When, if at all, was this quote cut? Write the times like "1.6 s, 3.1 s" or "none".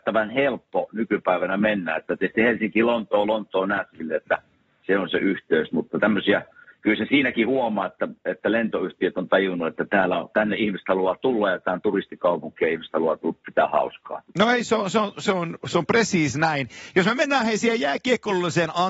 none